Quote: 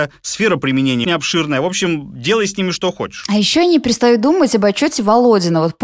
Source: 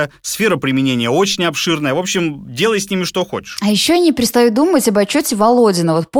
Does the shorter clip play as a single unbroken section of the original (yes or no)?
no